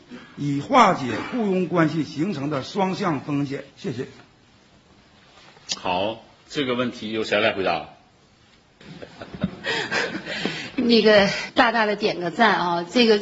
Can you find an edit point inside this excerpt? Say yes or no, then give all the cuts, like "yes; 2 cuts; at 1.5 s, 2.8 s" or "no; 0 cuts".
yes; 2 cuts; at 3.7 s, 11.5 s